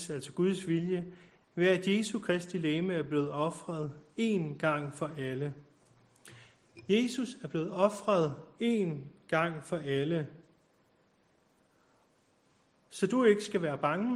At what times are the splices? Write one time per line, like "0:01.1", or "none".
0:01.4